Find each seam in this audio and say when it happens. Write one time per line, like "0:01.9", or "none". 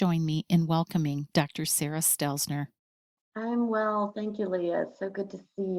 0:03.2